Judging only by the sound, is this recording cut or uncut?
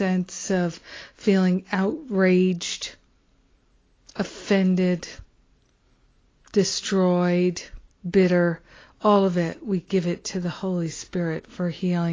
cut